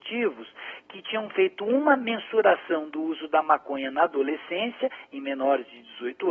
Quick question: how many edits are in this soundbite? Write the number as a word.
zero